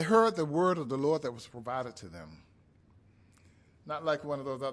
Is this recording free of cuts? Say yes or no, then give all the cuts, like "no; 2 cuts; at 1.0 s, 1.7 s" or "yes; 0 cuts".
no; 1 cut; at 3.7 s